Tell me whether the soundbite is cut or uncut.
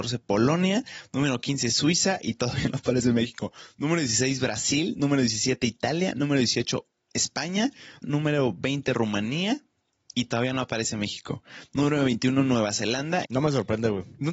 cut